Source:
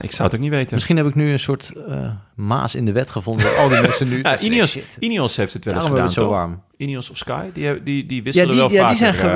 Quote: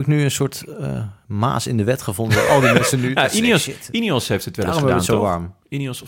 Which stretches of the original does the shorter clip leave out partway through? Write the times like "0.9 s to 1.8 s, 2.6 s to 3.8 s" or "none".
none